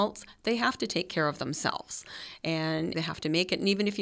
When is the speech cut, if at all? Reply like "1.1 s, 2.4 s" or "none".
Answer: 2.9 s